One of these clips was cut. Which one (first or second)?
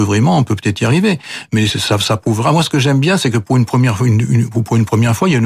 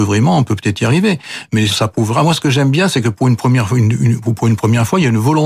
second